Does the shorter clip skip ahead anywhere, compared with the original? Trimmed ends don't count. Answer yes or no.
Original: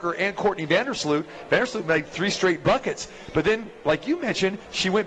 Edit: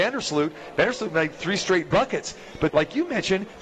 yes